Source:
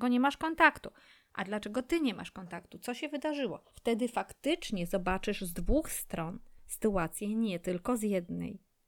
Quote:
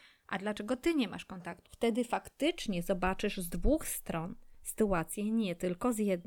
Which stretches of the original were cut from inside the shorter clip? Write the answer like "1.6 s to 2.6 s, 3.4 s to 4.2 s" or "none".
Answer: 2.7 s to 3.7 s

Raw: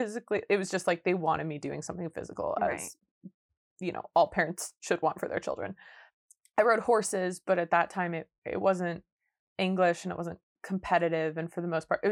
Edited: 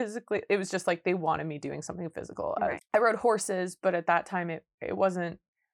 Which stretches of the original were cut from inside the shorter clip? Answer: 2.8 s to 6.4 s

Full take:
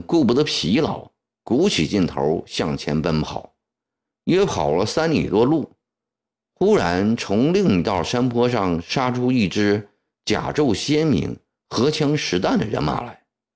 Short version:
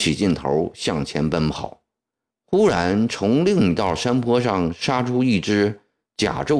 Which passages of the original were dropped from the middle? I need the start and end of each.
4.0 s to 6.4 s

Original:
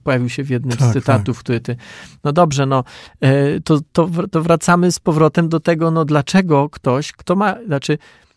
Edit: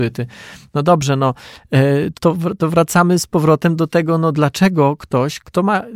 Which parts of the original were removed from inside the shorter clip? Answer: 3.6 s to 3.9 s

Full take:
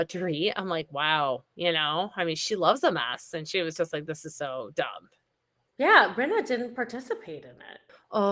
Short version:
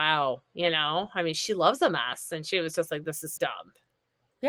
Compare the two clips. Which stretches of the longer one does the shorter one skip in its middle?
4.4 s to 4.7 s

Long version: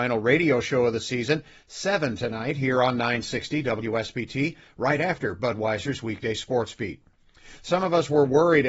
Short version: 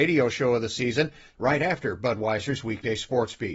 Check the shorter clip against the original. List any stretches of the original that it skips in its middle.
1.7 s to 4.7 s

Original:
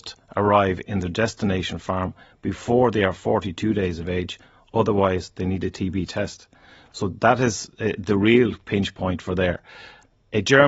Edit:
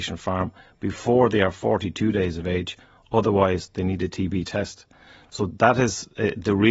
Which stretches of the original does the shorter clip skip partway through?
none

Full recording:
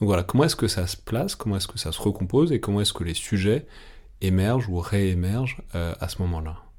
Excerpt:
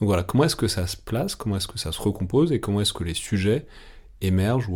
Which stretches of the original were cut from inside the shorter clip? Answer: none

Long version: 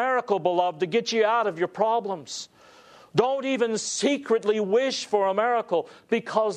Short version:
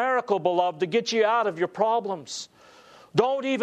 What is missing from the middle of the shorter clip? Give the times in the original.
none

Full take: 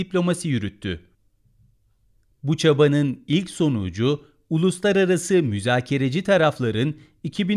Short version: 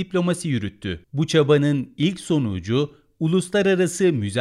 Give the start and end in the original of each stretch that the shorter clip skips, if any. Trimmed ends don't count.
1.0 s to 2.3 s

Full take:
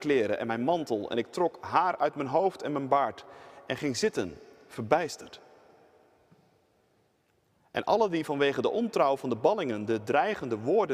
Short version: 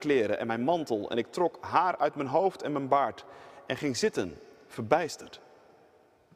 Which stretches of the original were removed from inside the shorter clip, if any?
none

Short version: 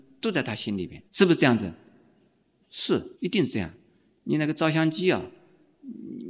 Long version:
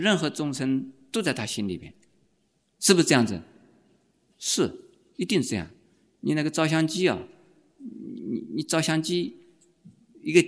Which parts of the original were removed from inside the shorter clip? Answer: 2.0 s to 2.7 s, 4.8 s to 5.1 s

